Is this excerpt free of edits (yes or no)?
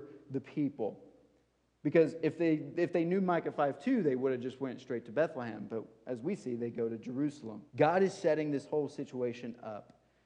no